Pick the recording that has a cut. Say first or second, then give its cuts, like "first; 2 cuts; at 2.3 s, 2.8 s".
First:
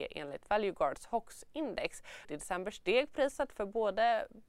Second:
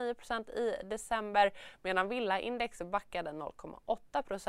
first; 1 cut; at 2.2 s